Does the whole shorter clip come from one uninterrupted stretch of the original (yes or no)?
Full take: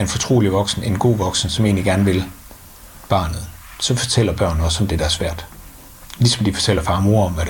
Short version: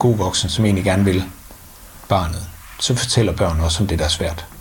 yes